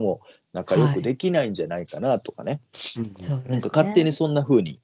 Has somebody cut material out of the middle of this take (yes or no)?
no